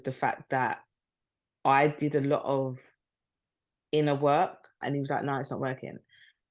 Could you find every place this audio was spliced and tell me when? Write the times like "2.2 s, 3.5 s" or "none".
4.8 s